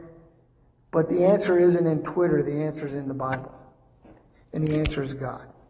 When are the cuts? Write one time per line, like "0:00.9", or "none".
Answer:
none